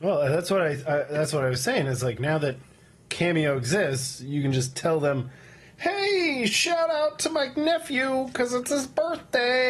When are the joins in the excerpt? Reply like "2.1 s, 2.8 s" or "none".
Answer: none